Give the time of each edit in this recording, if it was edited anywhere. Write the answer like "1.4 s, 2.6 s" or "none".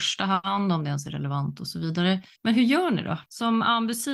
2.4 s

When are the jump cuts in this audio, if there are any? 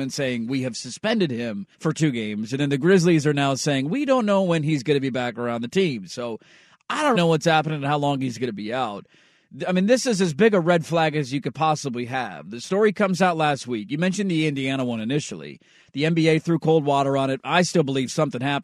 1.7 s, 7.2 s

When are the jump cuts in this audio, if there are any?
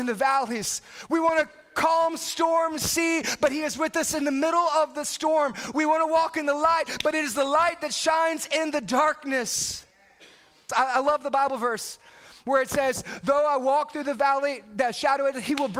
10.7 s

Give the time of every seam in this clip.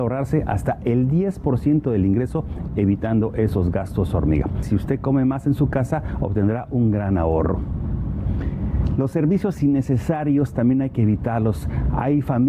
4.6 s

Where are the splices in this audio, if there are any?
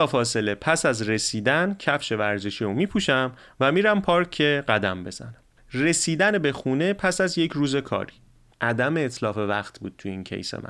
5.6 s, 8.5 s

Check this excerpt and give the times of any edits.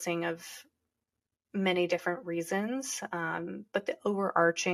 none

